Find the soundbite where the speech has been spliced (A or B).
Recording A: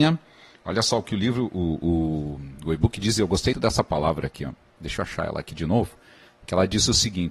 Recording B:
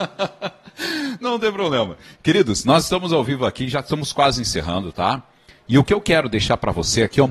A